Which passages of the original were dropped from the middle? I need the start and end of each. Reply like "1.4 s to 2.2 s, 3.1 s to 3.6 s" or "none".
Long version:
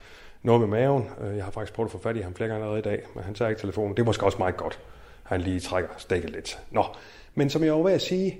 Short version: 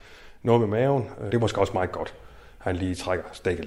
1.3 s to 3.9 s